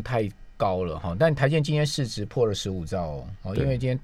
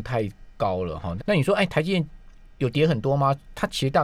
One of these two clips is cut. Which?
second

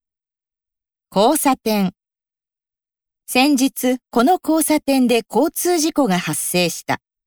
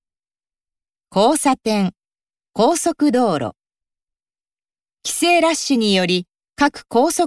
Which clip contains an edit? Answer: second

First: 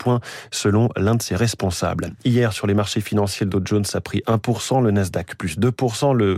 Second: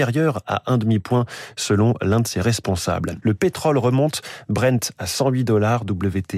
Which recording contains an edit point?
second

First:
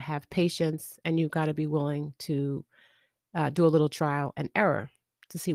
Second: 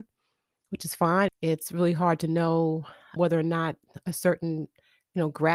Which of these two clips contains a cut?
second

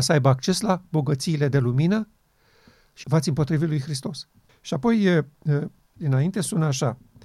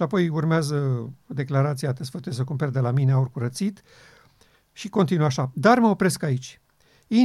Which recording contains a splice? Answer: first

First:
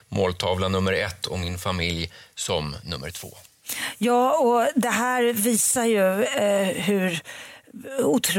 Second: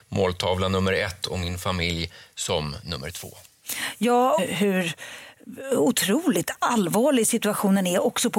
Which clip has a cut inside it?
second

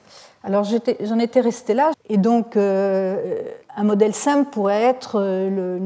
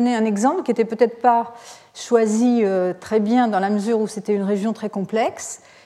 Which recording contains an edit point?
first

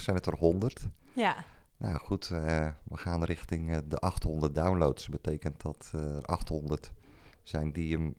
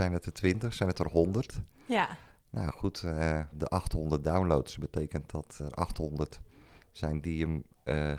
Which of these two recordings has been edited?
second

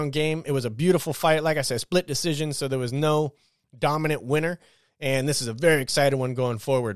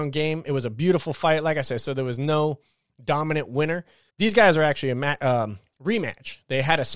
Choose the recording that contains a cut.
second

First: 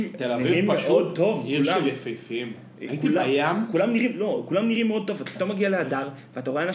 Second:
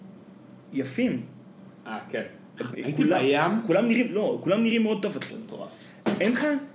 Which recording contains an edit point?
second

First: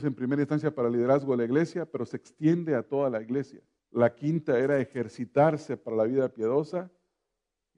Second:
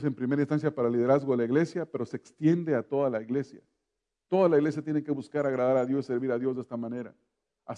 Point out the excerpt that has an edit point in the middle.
first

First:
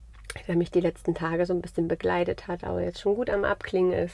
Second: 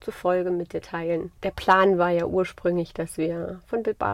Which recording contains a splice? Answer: second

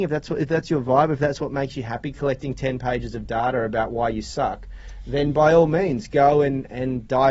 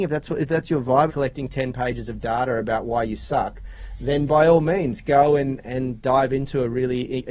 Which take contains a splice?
second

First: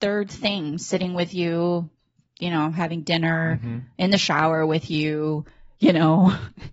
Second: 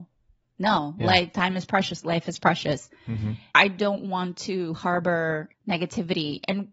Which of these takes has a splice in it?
second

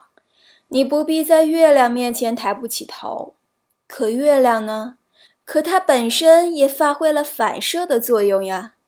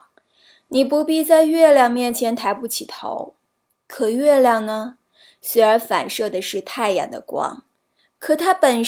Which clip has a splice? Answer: first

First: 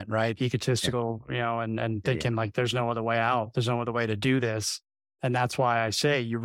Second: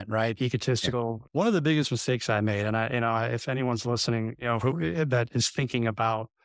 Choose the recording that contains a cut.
second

